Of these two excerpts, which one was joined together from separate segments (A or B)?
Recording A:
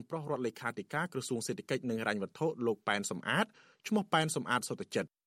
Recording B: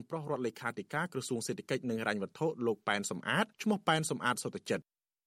B